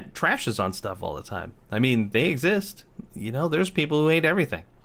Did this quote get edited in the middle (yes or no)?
no